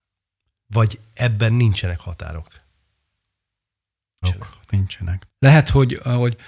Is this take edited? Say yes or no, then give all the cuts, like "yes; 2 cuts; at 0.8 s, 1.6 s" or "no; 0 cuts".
yes; 2 cuts; at 4.2 s, 5.3 s